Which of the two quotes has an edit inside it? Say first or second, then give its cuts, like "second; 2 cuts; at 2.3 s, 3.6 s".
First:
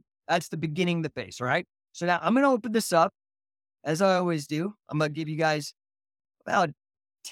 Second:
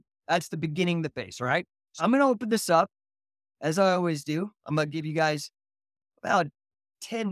second; 1 cut; at 2.0 s